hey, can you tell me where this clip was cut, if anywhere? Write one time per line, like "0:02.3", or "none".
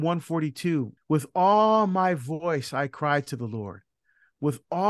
0:01.0